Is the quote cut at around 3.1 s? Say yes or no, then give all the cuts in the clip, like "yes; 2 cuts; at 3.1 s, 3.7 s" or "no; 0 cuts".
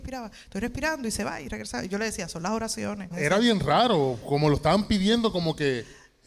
yes; 1 cut; at 3.1 s